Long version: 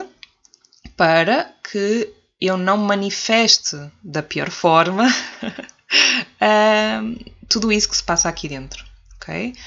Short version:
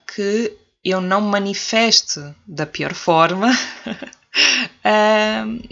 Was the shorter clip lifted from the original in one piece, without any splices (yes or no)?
yes